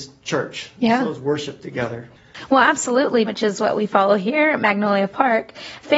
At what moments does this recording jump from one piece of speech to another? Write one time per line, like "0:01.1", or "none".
0:03.3